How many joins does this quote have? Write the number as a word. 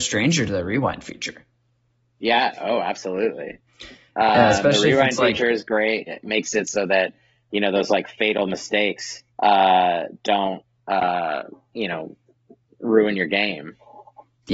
three